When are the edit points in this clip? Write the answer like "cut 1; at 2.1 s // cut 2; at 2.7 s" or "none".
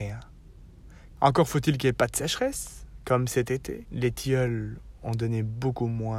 cut 1; at 1.2 s // cut 2; at 3.8 s